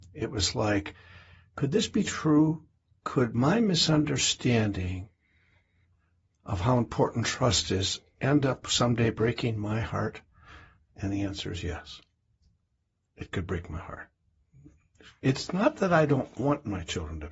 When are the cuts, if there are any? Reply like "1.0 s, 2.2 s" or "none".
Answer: none